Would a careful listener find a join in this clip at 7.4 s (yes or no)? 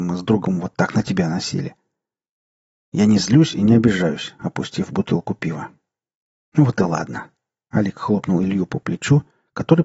no